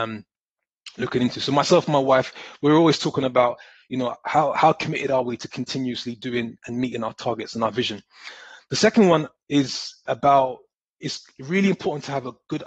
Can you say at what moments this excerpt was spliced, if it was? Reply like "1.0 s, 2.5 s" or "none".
none